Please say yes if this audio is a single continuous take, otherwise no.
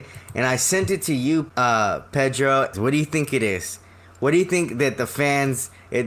no